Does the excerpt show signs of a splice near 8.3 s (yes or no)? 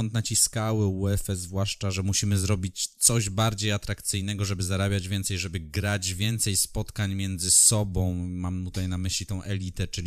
no